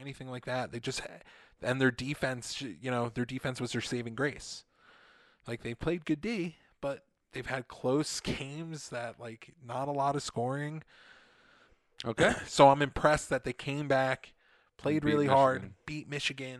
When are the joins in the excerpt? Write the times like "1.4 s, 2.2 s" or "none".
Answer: none

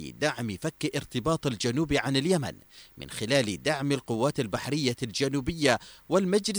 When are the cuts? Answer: none

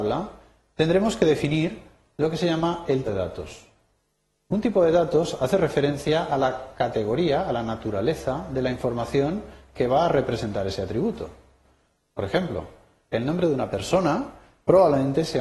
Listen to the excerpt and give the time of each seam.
3.1 s

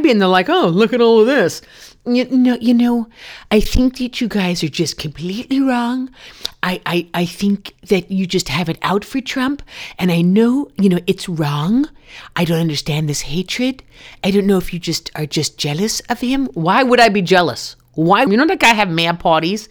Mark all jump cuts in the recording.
18.3 s

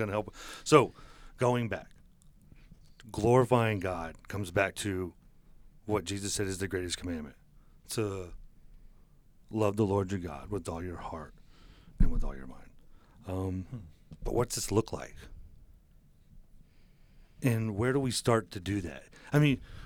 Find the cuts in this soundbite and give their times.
11.9 s

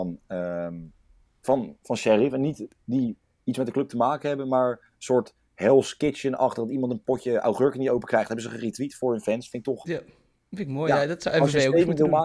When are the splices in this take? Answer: none

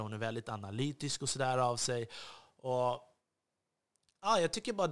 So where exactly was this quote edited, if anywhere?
none

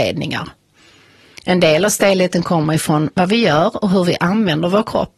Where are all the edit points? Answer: none

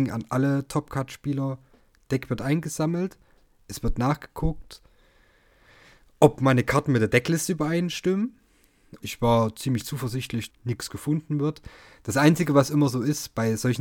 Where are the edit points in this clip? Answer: 9.0 s, 10.5 s

